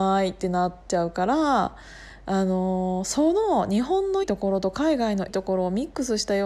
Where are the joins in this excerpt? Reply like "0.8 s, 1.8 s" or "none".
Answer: 4.2 s, 5.3 s